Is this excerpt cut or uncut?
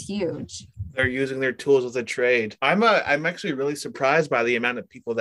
cut